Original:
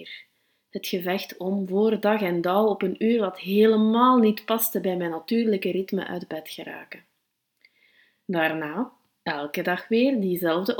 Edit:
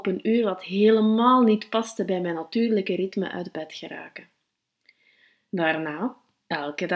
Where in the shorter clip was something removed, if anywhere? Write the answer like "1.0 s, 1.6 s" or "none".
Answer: none